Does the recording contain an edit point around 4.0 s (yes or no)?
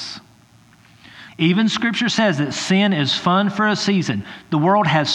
no